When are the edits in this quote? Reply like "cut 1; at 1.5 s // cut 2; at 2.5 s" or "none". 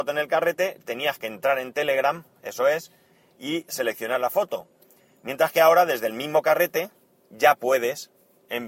none